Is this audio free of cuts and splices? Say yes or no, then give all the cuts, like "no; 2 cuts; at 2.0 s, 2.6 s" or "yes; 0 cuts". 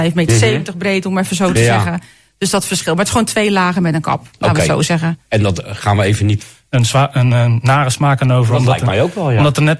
no; 1 cut; at 6.4 s